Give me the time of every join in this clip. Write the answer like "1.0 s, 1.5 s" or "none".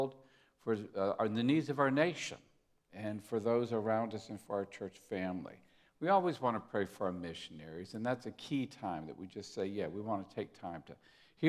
none